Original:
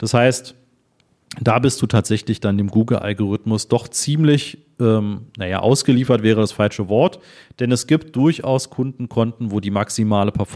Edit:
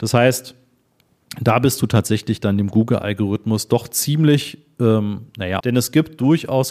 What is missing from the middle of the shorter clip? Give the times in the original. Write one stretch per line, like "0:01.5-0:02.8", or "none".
0:05.6-0:07.6